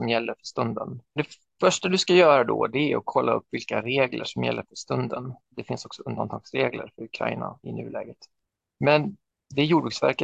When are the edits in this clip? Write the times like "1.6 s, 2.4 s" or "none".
1.2 s, 5.5 s, 7.6 s